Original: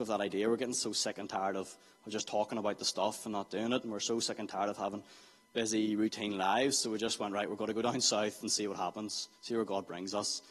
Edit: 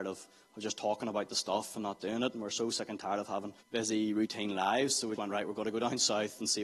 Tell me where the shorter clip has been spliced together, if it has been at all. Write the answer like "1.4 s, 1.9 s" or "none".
3.6 s, 5.2 s